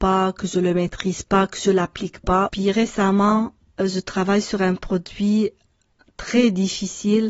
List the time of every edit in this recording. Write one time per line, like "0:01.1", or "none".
0:02.5